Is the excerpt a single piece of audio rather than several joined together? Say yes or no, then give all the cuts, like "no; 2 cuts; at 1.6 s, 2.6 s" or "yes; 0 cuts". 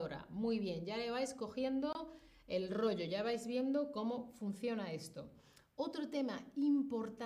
yes; 0 cuts